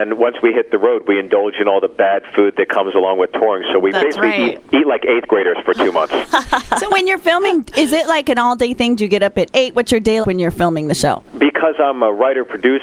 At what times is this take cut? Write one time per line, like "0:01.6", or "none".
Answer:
0:10.2